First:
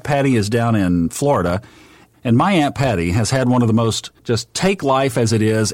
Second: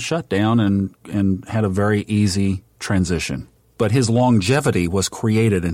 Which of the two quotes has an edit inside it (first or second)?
first